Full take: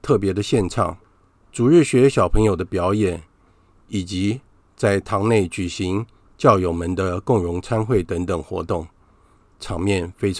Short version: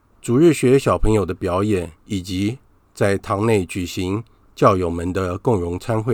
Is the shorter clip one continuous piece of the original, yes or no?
no